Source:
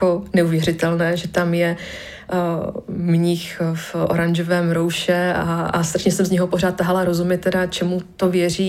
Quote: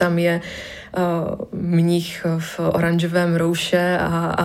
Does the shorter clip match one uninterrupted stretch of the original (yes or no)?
yes